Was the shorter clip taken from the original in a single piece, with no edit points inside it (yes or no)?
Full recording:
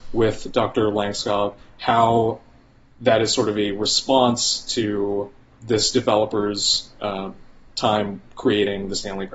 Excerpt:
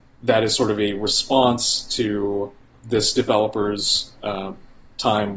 yes